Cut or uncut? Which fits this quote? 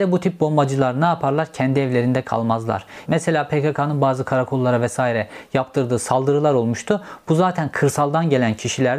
cut